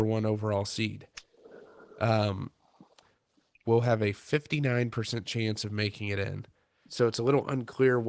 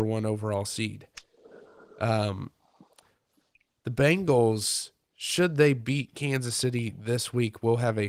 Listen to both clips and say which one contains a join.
first; 2 cuts; at 3.6 s, 6.9 s

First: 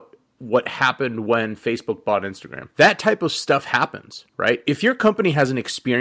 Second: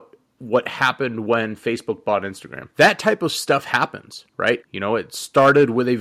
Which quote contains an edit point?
second; 1 cut; at 4.6 s

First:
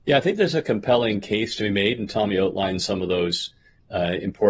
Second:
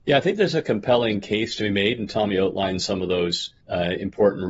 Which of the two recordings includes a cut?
second; 1 cut; at 3.6 s

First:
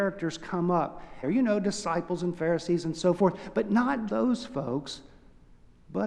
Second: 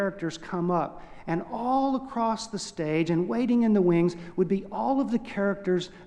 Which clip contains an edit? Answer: first; 2 cuts; at 1.2 s, 4.1 s

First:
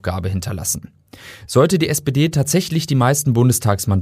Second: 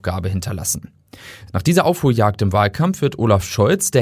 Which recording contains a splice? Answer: second; 1 cut; at 1.5 s

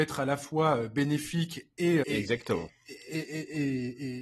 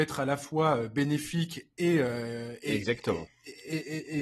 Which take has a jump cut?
first; 1 cut; at 2.0 s

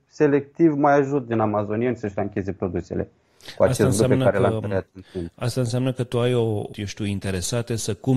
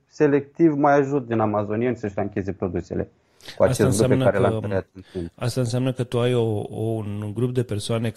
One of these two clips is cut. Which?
first; 1 cut; at 6.7 s

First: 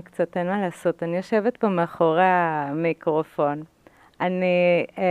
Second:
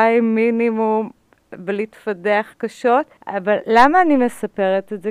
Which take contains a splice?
second; 1 cut; at 3.2 s

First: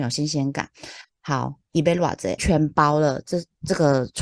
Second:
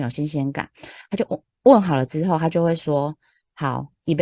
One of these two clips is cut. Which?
first; 2 cuts; at 1.0 s, 2.4 s

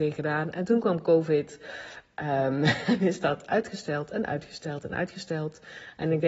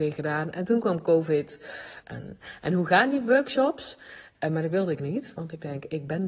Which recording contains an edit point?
second; 2 cuts; at 2.0 s, 4.4 s

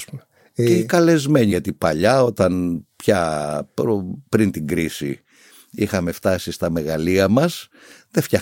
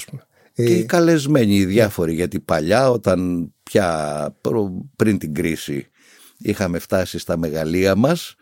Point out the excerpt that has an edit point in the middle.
first; 1 cut; at 1.5 s

